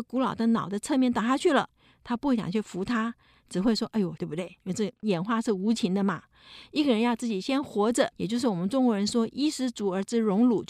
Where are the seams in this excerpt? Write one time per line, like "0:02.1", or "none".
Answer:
0:04.2
0:08.1